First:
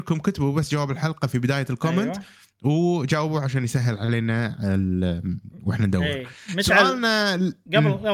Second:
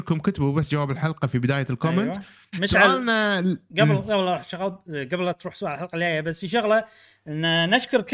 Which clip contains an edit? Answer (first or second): second